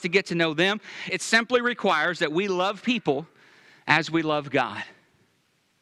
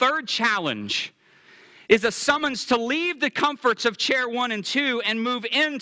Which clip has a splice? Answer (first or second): first